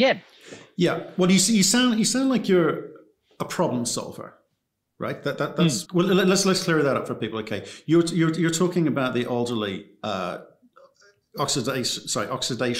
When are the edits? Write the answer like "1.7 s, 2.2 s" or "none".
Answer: 5.8 s